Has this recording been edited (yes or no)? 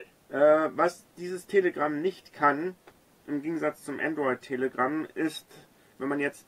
no